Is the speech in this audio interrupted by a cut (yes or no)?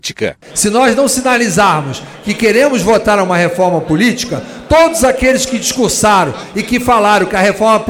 no